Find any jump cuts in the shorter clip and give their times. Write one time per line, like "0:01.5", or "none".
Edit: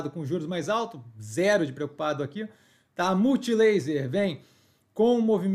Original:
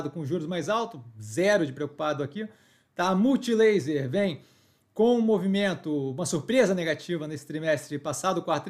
none